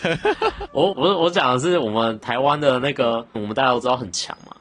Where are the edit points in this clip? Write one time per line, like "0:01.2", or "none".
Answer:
0:00.9
0:03.3